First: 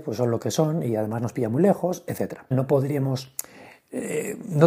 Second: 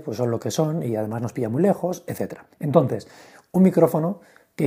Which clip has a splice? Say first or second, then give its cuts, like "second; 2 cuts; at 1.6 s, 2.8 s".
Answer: first; 1 cut; at 2.5 s